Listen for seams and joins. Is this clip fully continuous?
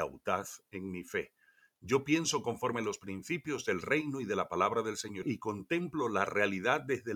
no; 1 cut; at 5.2 s

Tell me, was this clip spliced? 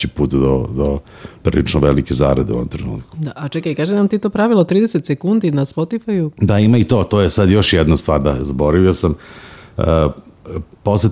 no; 0 cuts

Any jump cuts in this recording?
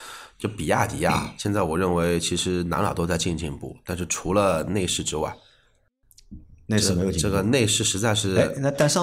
no; 0 cuts

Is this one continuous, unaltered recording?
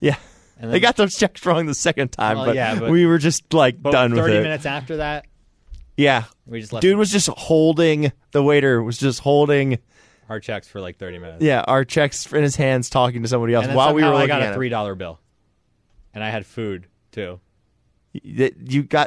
yes; 0 cuts

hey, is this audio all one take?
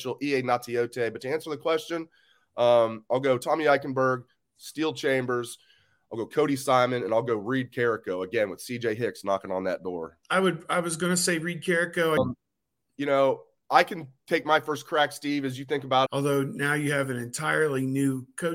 no; 3 cuts; at 10.2 s, 12.2 s, 16.1 s

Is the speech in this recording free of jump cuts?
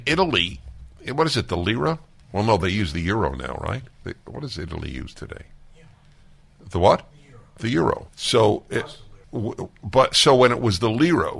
no; 2 cuts; at 8.1 s, 9.2 s

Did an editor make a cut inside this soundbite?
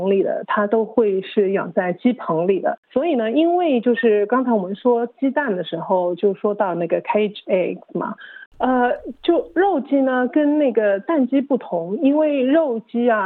yes; 1 cut; at 8.5 s

